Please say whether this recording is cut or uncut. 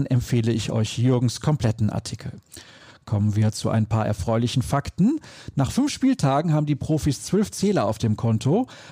uncut